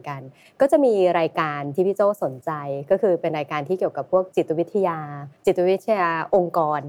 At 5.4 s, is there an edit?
yes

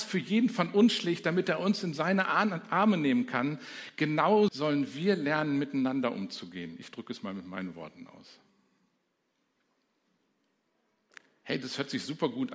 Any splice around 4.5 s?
yes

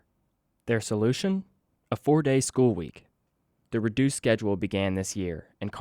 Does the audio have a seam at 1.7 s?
no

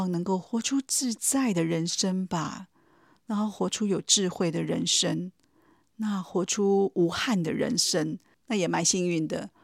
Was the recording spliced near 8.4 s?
yes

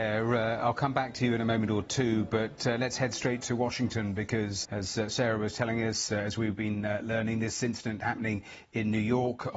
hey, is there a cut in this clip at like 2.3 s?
no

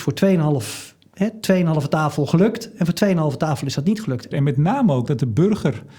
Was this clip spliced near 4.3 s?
yes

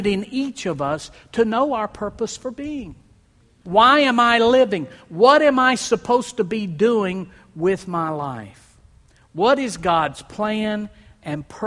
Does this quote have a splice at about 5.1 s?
no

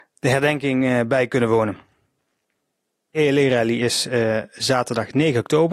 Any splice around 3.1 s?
yes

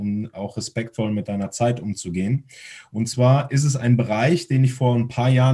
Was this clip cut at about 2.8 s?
no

